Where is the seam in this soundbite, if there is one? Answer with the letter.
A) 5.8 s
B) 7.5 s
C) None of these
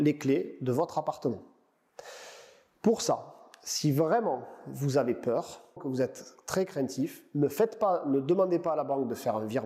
A